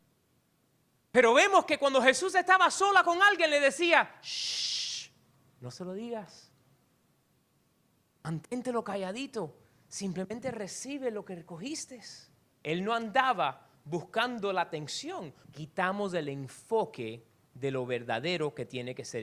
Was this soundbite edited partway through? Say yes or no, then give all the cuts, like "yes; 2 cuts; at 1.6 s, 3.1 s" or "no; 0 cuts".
yes; 2 cuts; at 12.5 s, 15.4 s